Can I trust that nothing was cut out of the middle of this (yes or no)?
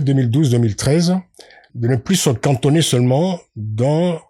no